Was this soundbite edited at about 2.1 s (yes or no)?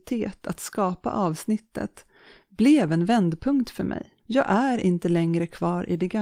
no